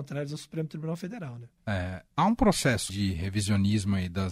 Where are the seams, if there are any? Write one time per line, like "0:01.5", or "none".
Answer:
0:01.6
0:02.9